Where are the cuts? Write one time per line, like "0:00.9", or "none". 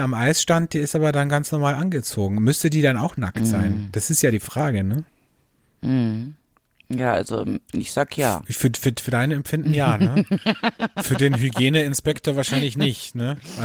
none

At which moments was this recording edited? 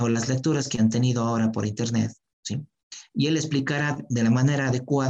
none

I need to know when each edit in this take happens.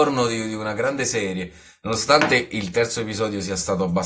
none

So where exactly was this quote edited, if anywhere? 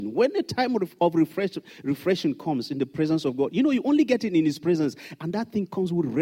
none

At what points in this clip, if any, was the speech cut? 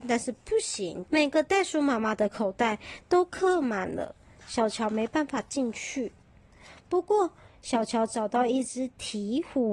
0:01.0

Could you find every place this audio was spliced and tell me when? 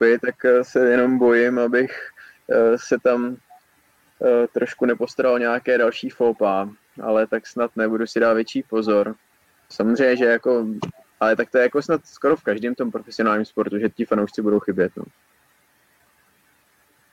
0:09.7

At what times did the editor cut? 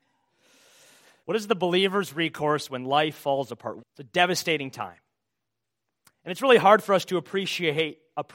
0:01.2
0:03.8

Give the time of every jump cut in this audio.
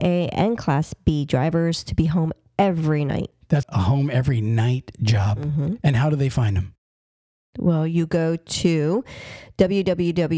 0:03.6

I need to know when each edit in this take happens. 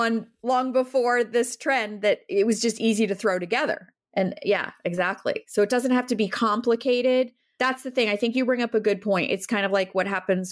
none

